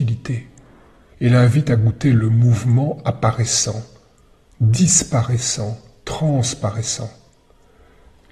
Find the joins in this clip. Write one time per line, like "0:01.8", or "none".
0:01.1